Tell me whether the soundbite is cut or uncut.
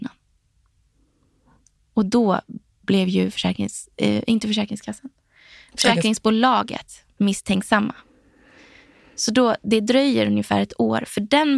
uncut